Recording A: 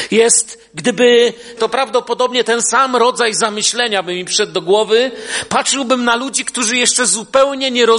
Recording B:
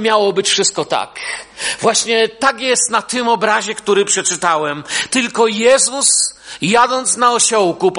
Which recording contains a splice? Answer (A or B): A